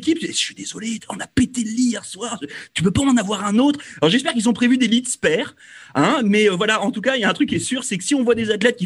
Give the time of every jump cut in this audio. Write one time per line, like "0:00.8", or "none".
none